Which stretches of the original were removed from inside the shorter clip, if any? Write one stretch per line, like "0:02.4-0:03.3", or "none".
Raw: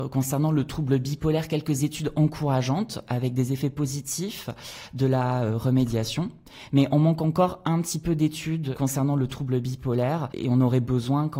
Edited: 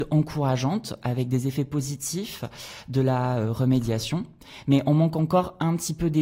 none